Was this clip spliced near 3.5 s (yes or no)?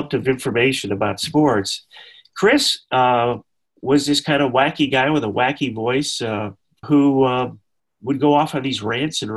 no